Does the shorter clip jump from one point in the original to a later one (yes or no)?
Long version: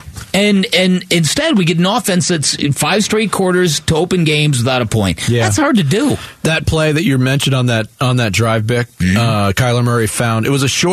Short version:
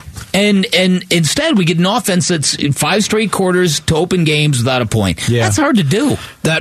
no